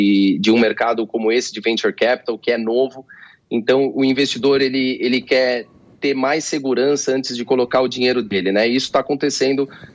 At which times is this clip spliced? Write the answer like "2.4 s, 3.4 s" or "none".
none